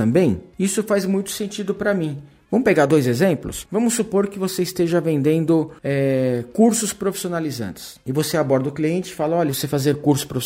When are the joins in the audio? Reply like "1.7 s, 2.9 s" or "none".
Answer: 2.5 s, 9.5 s